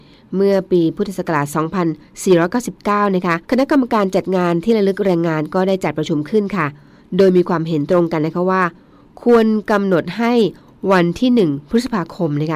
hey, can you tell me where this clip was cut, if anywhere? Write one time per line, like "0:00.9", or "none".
0:03.4